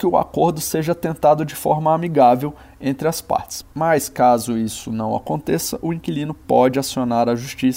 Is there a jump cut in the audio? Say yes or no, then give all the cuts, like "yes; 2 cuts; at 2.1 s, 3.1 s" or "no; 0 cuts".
no; 0 cuts